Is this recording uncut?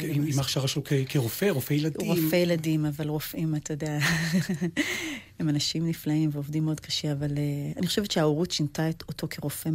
yes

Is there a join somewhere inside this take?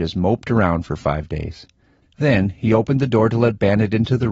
no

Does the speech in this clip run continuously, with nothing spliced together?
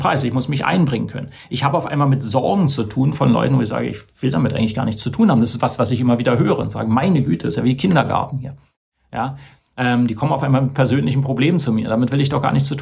yes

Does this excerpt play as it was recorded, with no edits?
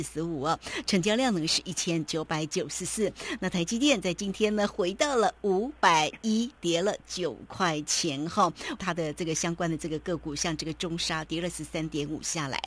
no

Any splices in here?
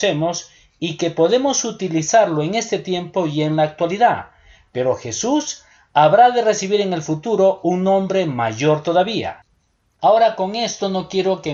yes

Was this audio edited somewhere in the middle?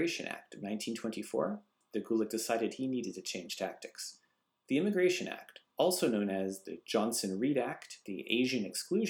no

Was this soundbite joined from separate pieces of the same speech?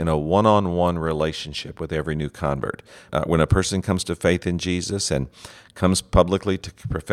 yes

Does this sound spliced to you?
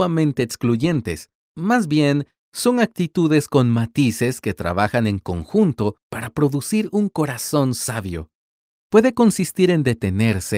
yes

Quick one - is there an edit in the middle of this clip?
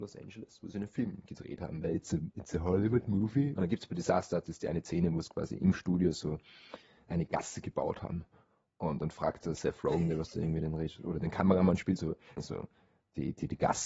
yes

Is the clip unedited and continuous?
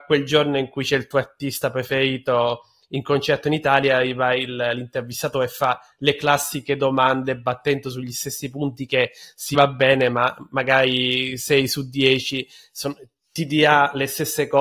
no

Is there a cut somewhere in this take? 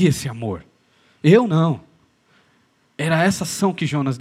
no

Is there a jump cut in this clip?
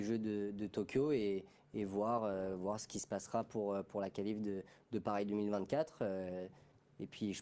no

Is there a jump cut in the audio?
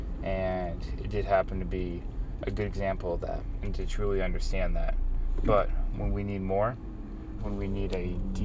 yes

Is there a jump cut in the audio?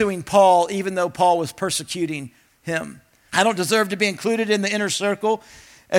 yes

